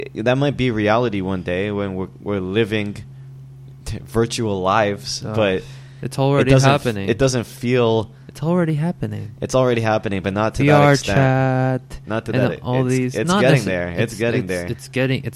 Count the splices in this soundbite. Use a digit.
0